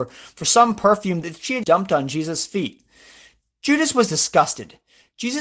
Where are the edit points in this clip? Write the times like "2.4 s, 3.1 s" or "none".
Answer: 1.6 s